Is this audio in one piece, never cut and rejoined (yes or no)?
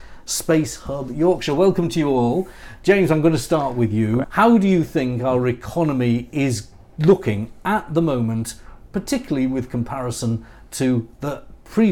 no